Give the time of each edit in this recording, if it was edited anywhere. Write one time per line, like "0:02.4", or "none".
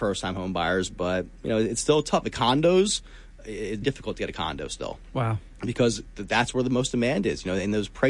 0:03.8